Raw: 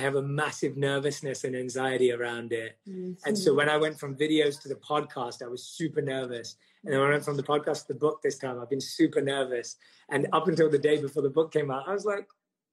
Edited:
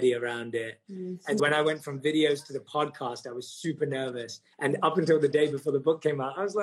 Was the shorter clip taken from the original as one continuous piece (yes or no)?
no